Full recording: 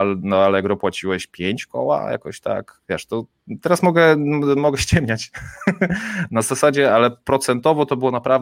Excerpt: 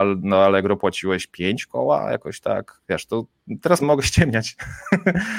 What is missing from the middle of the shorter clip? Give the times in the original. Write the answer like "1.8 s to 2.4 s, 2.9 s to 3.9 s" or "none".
3.8 s to 4.6 s